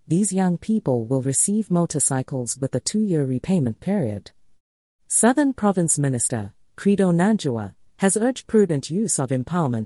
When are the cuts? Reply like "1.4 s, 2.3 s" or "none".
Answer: none